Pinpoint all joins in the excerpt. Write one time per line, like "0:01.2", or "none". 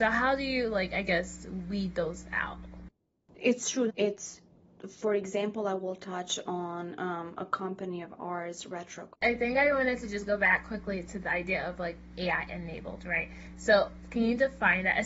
0:03.9
0:09.1